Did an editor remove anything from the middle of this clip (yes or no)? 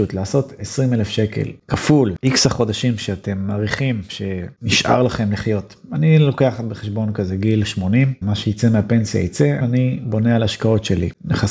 yes